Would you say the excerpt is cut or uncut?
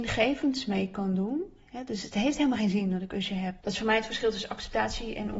cut